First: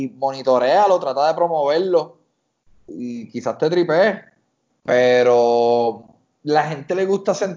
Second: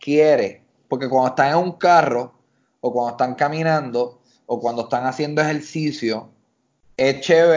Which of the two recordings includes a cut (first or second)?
first